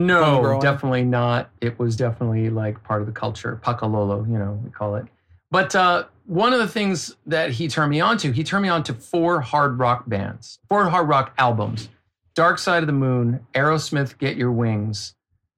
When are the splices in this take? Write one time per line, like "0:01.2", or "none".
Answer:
none